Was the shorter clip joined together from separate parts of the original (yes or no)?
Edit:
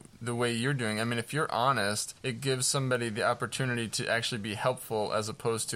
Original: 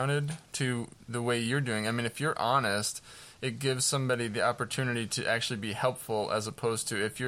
yes